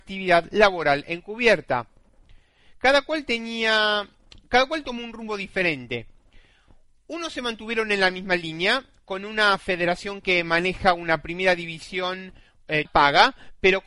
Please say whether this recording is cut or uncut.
cut